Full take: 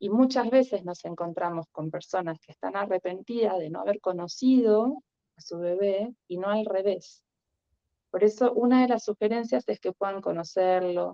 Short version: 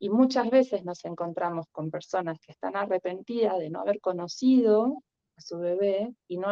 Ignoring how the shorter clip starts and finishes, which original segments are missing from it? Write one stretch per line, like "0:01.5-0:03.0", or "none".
none